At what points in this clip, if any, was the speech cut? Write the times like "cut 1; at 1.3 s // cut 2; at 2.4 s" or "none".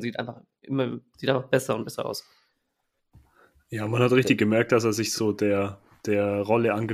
none

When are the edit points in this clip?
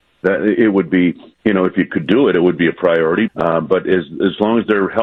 cut 1; at 3.3 s

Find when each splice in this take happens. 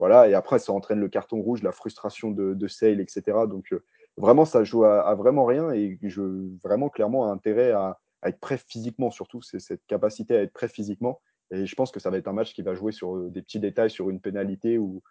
none

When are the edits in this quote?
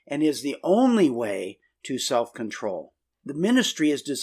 cut 1; at 3.1 s

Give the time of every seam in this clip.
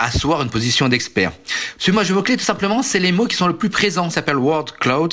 cut 1; at 1.8 s // cut 2; at 4.1 s

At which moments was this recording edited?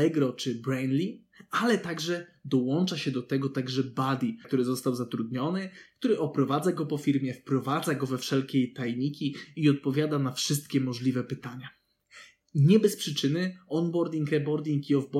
cut 1; at 4.4 s

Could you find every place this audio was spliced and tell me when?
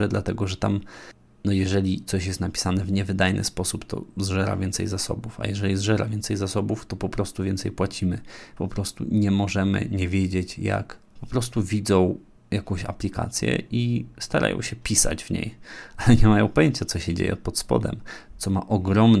cut 1; at 8.6 s // cut 2; at 11.2 s

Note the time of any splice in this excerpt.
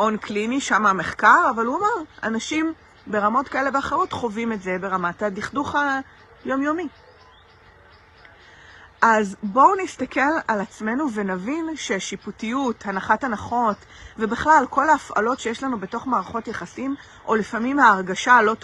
none

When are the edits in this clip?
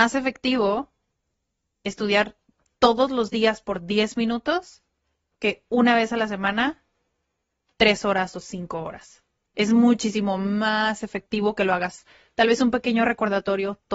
none

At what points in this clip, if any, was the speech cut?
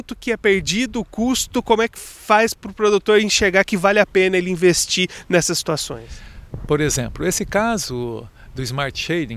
none

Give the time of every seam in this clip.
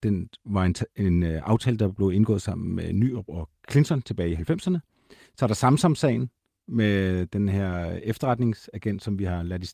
none

